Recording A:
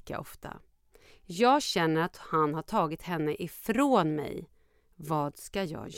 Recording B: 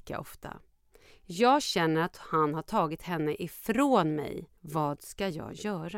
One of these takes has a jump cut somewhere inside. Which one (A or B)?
B